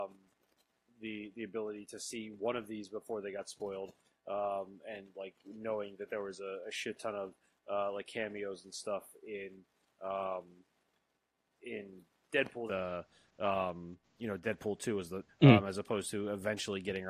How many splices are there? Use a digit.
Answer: 3